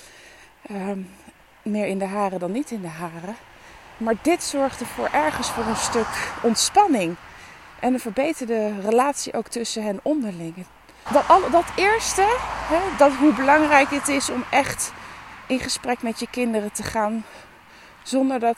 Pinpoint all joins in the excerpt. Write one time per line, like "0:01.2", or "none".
0:11.1
0:12.9